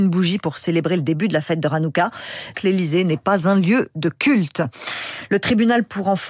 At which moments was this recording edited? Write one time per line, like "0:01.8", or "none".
0:02.5